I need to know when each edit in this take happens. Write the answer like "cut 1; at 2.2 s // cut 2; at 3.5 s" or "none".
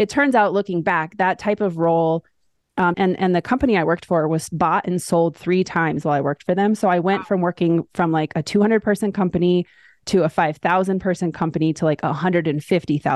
cut 1; at 2.9 s

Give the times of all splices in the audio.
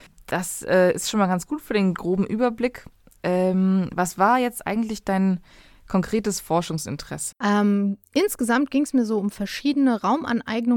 cut 1; at 7.3 s

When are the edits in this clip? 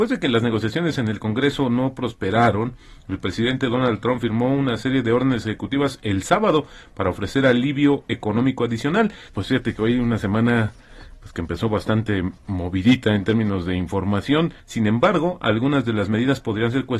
cut 1; at 9.3 s // cut 2; at 14.6 s

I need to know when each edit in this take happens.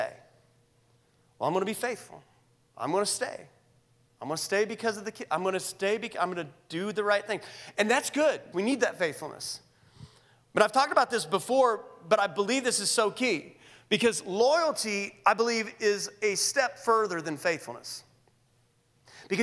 cut 1; at 8.5 s

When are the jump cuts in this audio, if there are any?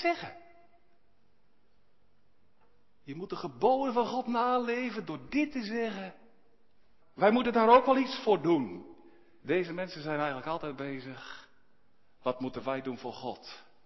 cut 1; at 7.0 s // cut 2; at 9.4 s

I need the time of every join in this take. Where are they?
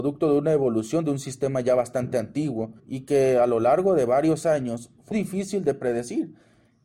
cut 1; at 2.8 s // cut 2; at 5.1 s

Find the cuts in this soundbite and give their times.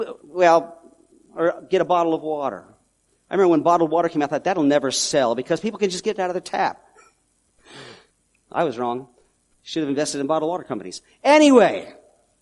none

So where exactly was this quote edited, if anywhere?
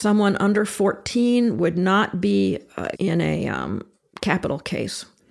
cut 1; at 2.9 s

